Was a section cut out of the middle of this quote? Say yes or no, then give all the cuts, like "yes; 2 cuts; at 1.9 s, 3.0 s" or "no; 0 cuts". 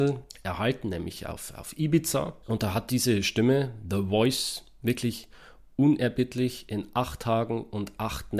no; 0 cuts